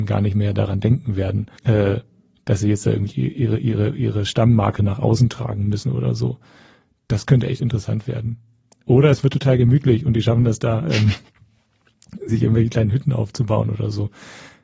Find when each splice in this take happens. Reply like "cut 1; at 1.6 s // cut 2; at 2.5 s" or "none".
cut 1; at 1.6 s // cut 2; at 12.3 s

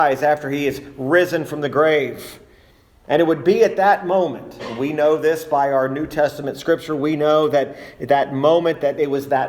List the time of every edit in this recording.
none

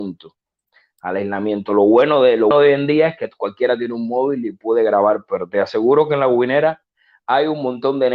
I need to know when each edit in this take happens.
cut 1; at 2.5 s

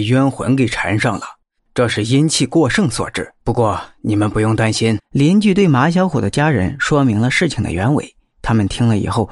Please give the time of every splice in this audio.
cut 1; at 1.6 s // cut 2; at 3.4 s // cut 3; at 5.0 s

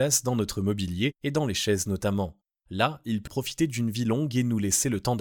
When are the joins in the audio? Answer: cut 1; at 3.3 s

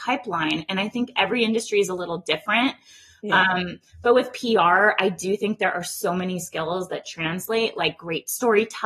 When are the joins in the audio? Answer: none

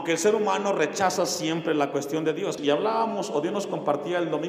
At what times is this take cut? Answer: cut 1; at 2.6 s

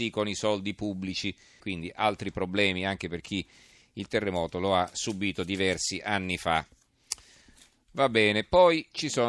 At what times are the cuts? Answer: cut 1; at 1.6 s

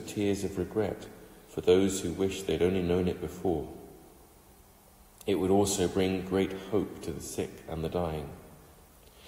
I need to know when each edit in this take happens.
none

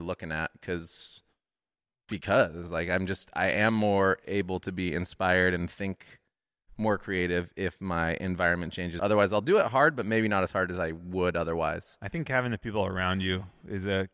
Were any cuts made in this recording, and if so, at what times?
cut 1; at 9.0 s

